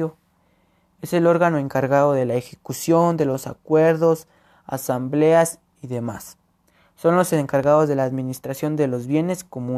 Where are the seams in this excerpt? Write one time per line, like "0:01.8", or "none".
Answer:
none